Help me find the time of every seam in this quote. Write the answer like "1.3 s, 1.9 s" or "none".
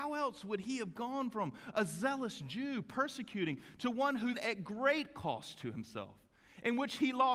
4.3 s

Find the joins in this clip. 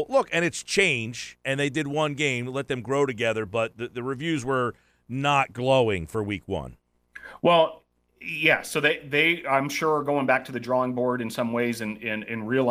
none

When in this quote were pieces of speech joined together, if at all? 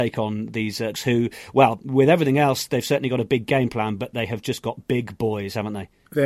0.9 s

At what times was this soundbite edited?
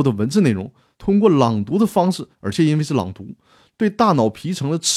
0.9 s, 2.3 s

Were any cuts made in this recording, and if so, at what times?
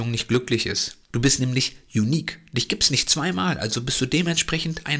1.1 s

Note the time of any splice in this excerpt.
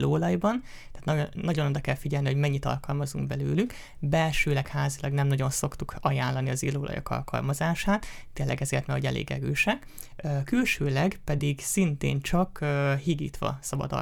none

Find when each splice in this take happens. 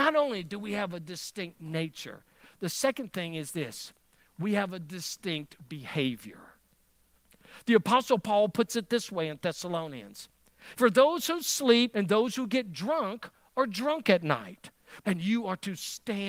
10.7 s, 11.9 s, 15.0 s

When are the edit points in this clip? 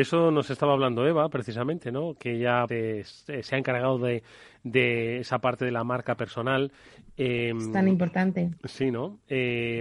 2.7 s

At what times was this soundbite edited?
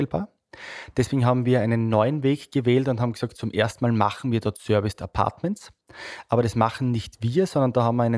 none

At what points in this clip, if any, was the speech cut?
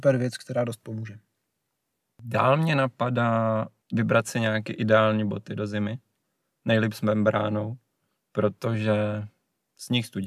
none

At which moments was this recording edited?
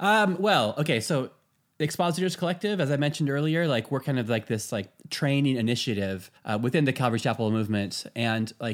6.4 s

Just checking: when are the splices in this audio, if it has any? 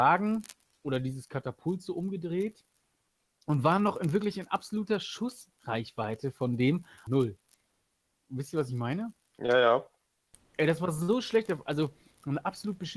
7.1 s

